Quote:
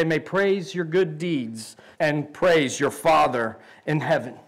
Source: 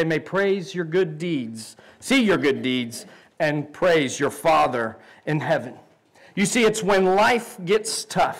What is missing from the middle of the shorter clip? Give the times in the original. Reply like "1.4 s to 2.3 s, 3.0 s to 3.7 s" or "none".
1.9 s to 3.3 s